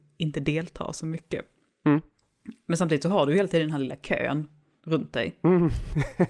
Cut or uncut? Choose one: uncut